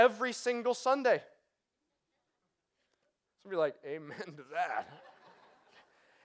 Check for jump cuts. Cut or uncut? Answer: uncut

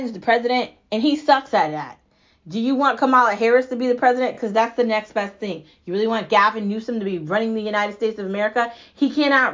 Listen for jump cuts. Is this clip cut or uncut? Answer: uncut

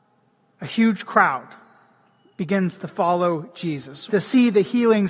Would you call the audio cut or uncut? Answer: cut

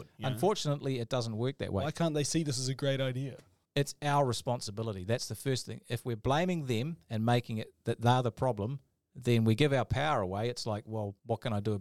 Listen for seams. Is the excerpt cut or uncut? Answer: uncut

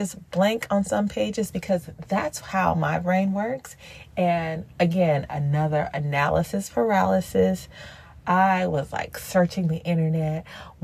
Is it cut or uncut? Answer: uncut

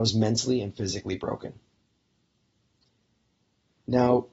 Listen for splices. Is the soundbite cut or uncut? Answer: uncut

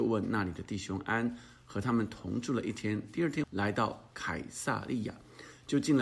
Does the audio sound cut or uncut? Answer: cut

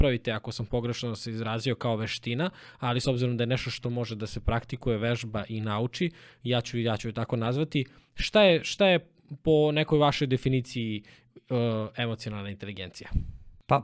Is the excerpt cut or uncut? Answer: uncut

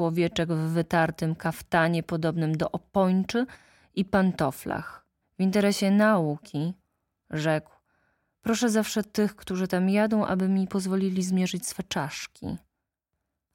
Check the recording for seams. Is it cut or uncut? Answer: cut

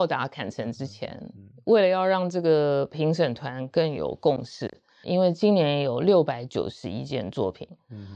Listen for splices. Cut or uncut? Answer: cut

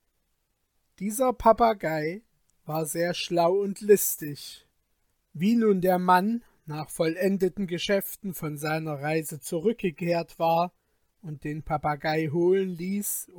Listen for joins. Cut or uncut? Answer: uncut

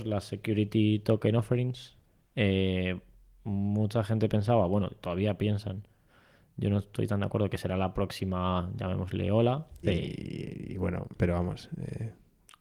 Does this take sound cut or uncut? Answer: cut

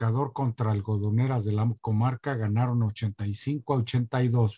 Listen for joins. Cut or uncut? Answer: uncut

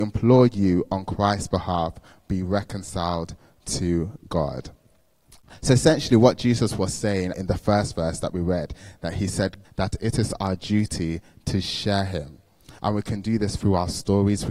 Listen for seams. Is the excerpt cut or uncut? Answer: cut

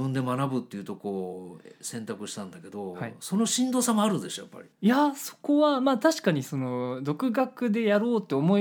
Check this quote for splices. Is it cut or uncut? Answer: cut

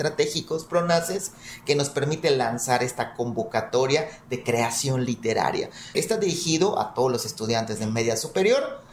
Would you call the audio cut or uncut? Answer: cut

